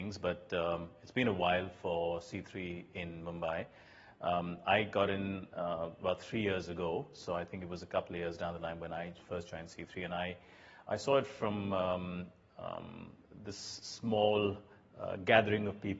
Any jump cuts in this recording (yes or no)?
no